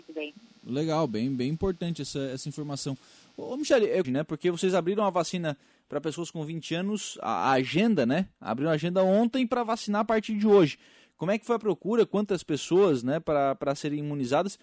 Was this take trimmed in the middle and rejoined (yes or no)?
yes